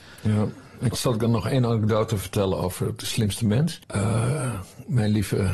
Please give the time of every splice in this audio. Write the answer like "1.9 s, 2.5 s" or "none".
0.9 s, 3.8 s